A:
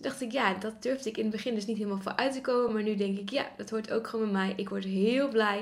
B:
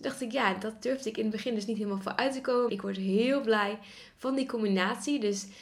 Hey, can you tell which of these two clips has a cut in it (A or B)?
B